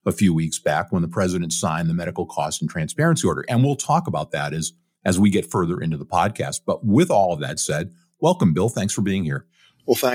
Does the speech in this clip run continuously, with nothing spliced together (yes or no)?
yes